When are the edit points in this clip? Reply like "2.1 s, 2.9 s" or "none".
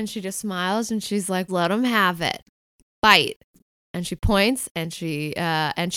1.5 s

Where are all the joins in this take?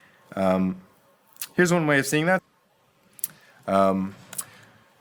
2.4 s

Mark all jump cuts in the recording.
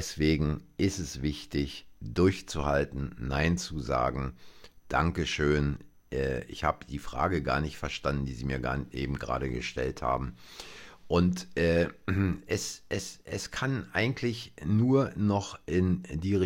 none

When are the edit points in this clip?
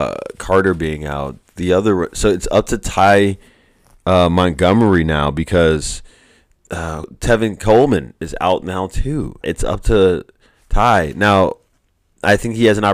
7.0 s, 9.4 s

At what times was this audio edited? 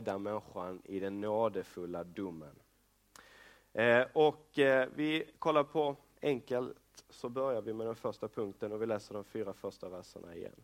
6.2 s

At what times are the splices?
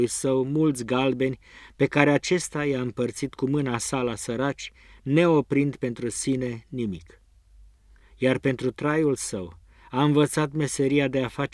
none

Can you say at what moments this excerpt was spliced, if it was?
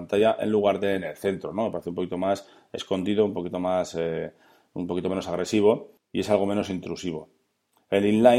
none

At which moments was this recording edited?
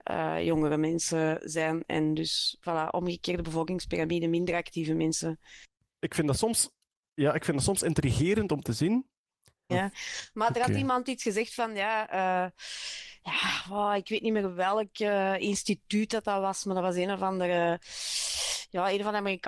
9.7 s

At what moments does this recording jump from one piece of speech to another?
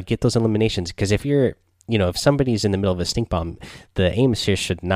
none

